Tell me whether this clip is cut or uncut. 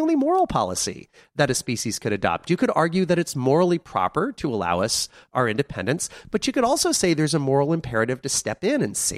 uncut